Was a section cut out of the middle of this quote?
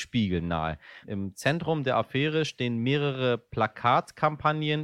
yes; 1 cut; at 1.0 s

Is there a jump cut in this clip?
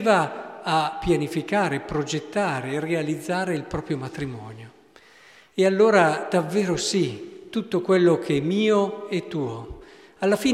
no; 0 cuts

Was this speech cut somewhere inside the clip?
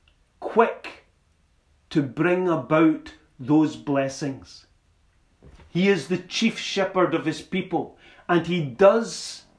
no; 0 cuts

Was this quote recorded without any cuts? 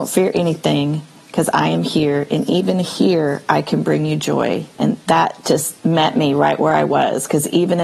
no; 1 cut; at 4.7 s

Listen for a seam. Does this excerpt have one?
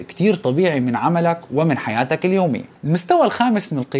yes; 1 cut; at 2.8 s

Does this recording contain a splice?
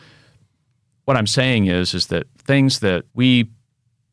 yes; 1 cut; at 3.1 s

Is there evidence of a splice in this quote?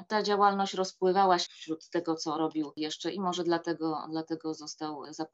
yes; 1 cut; at 1.5 s

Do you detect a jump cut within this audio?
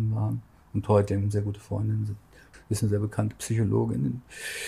yes; 1 cut; at 2.5 s

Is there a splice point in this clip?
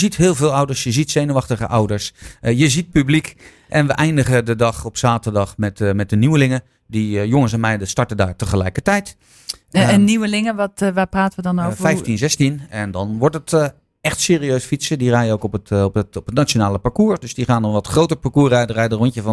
no; 0 cuts

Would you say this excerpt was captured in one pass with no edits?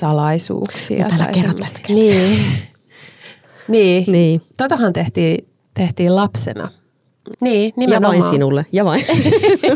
no; 1 cut; at 7.3 s

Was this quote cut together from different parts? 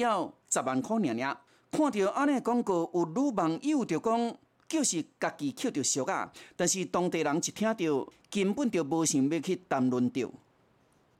no; 0 cuts

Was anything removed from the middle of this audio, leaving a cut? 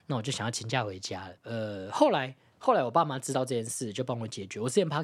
yes; 1 cut; at 1.4 s

